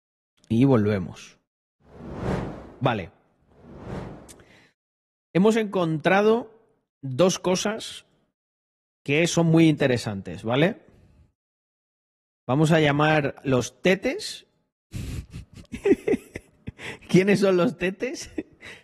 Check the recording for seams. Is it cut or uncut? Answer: uncut